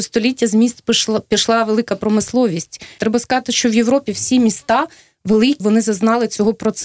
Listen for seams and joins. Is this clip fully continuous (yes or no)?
no